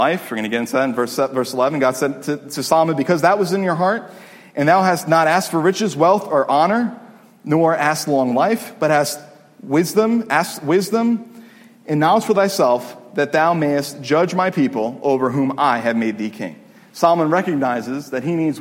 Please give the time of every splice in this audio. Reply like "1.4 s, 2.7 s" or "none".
none